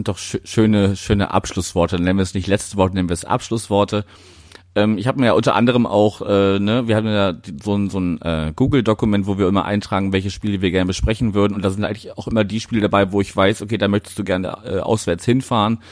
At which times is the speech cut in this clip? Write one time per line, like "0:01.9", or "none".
none